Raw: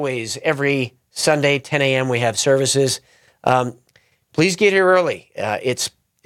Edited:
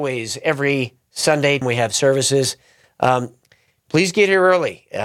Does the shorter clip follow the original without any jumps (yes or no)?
no